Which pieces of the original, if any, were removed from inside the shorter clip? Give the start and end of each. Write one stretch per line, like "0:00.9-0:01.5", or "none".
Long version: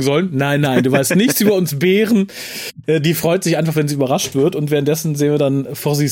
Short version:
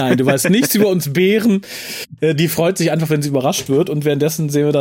none

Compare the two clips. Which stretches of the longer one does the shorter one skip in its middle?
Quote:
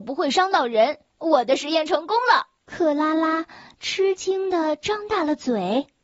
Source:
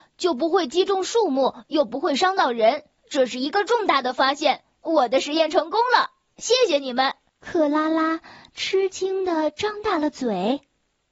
0:02.9-0:04.7
0:06.2-0:07.3

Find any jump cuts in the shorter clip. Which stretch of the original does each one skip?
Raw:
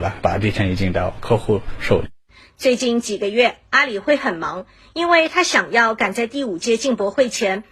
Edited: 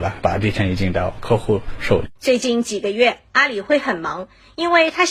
0:02.2-0:02.5

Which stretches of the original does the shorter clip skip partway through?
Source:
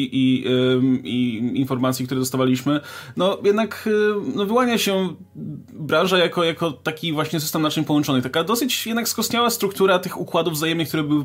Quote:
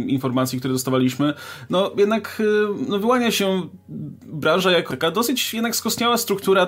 0:06.4-0:08.2

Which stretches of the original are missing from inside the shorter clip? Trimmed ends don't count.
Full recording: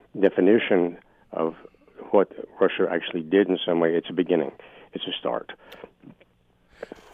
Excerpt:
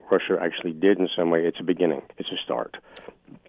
0:04.6-0:04.9

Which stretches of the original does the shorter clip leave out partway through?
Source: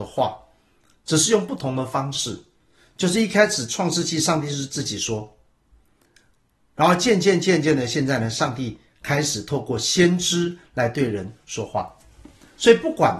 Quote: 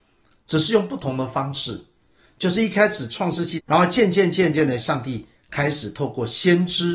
0:04.2-0:06.7
0:07.9-0:08.3

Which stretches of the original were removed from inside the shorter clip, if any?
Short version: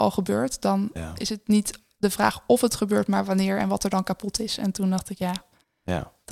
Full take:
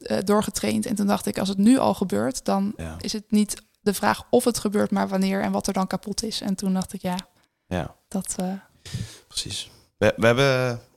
none

